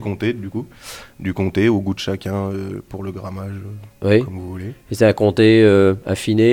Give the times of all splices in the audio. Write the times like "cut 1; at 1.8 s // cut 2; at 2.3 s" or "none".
none